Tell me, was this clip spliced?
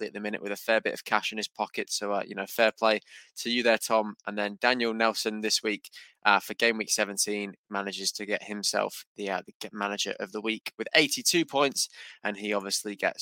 no; 0 cuts

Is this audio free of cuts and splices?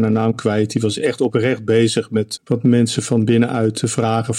no; 1 cut; at 2.4 s

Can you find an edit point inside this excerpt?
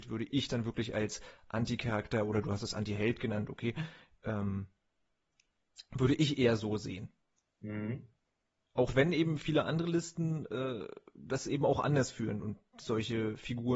no; 0 cuts

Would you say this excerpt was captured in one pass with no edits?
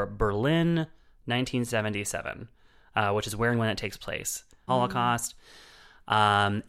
no; 1 cut; at 4.7 s

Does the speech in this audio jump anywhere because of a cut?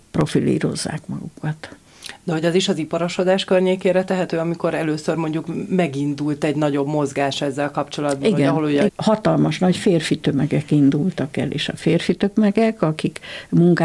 yes; 1 cut; at 8.9 s

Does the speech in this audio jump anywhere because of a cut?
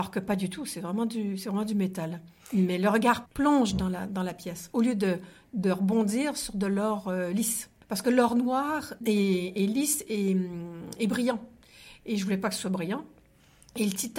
no; 0 cuts

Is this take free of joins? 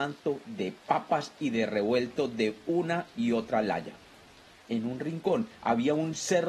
no; 1 cut; at 4.5 s

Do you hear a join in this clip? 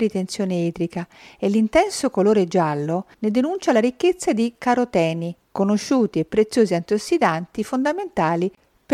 no; 0 cuts

